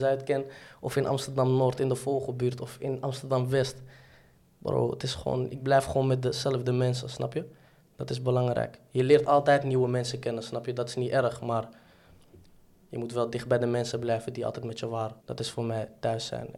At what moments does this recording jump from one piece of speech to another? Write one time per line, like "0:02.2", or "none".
0:15.2